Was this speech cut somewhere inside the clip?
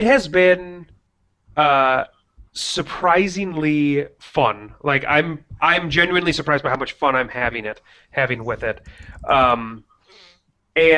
no; 0 cuts

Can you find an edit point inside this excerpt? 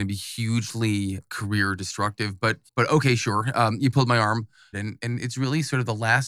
yes; 2 cuts; at 2.7 s, 4.7 s

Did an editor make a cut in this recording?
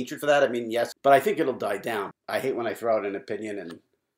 yes; 2 cuts; at 0.9 s, 2.1 s

